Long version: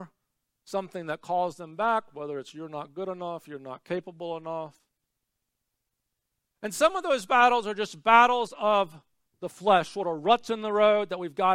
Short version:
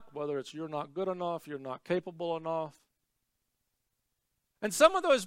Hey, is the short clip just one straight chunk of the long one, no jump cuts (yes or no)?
yes